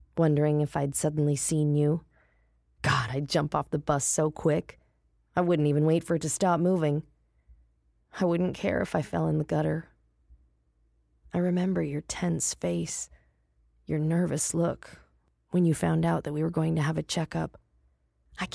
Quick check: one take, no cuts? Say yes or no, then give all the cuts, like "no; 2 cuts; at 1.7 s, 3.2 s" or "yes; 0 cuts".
yes; 0 cuts